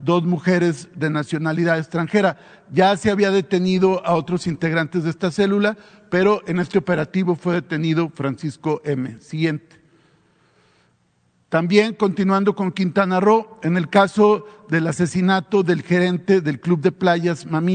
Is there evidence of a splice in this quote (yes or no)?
no